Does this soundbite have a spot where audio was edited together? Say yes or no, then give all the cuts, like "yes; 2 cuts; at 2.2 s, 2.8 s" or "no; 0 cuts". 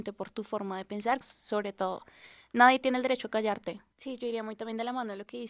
yes; 2 cuts; at 1.2 s, 3.9 s